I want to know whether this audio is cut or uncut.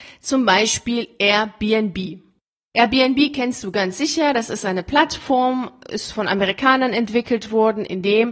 uncut